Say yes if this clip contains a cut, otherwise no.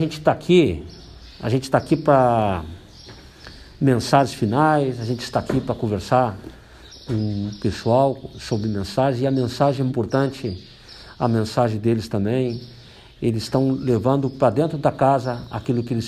yes